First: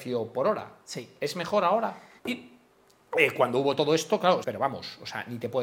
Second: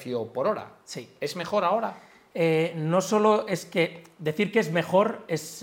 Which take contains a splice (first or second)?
first